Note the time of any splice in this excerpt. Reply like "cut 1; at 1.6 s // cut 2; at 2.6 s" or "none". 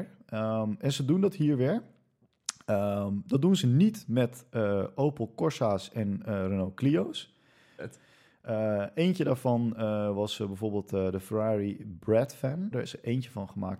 cut 1; at 7.8 s // cut 2; at 12.7 s

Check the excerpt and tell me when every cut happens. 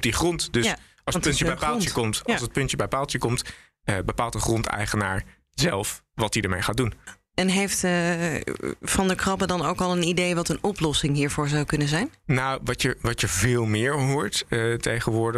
none

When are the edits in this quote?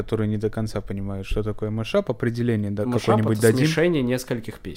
none

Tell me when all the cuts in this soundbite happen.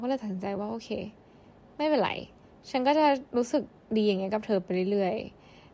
none

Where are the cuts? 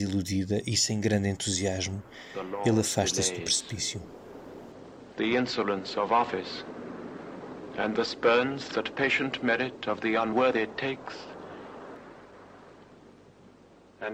none

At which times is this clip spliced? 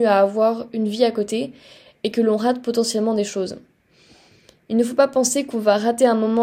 none

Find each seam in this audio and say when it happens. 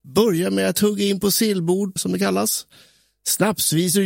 cut 1; at 2.0 s

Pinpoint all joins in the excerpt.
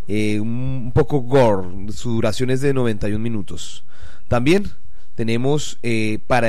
none

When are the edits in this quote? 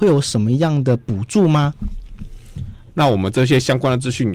cut 1; at 2.9 s

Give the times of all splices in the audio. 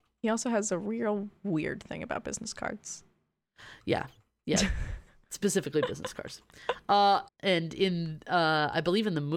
cut 1; at 7.3 s

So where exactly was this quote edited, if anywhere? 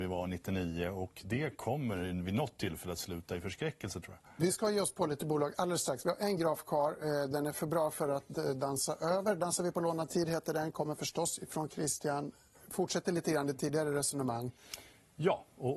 none

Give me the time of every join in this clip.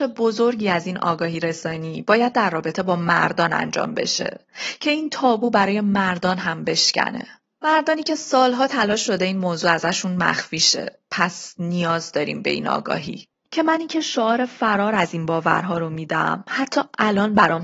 cut 1; at 13.4 s

